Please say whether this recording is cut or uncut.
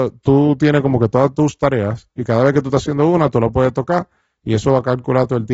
uncut